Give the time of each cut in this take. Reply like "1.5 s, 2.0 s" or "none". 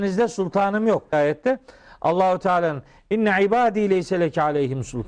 1.1 s